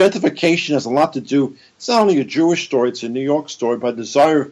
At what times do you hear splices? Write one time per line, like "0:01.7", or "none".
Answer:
none